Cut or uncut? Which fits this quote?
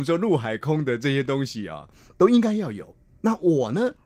uncut